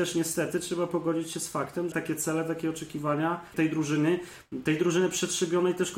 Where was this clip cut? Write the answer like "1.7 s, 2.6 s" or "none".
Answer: 1.9 s, 3.5 s